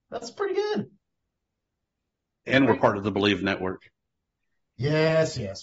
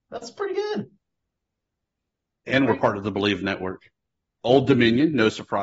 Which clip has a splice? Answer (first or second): second